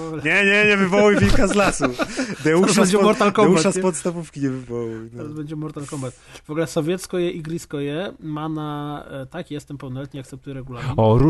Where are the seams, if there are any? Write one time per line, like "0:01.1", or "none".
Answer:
none